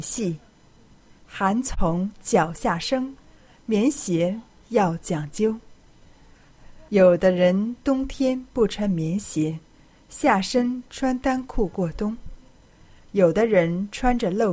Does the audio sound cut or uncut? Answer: uncut